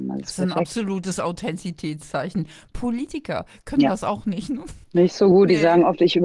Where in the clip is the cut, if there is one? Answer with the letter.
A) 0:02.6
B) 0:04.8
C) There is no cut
C